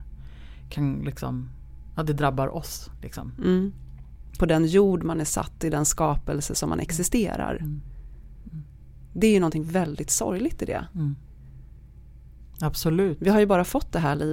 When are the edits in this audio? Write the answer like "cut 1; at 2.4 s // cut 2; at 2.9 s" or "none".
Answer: cut 1; at 4.4 s